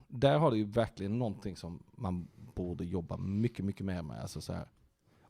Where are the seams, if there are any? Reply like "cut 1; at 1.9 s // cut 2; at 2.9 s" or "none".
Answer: none